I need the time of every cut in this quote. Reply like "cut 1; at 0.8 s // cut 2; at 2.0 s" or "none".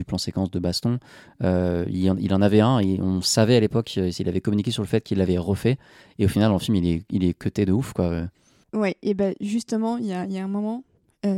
none